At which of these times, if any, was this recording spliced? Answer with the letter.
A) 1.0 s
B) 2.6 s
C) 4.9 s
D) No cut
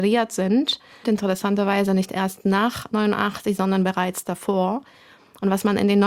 A